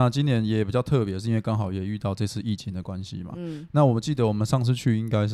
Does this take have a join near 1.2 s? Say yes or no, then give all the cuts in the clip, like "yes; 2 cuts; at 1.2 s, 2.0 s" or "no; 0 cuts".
no; 1 cut; at 3.7 s